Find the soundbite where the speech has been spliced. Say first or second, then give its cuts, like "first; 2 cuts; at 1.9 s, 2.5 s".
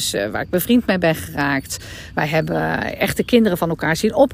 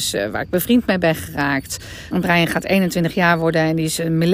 second; 1 cut; at 2.1 s